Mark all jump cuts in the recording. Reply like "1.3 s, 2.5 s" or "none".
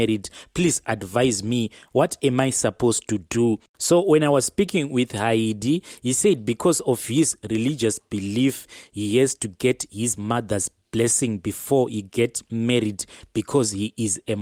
none